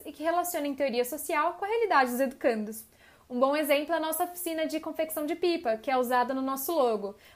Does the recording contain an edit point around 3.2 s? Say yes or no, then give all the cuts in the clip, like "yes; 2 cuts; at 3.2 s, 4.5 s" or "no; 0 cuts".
no; 0 cuts